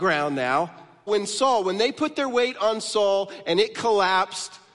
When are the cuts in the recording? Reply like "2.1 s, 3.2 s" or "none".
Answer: 1.1 s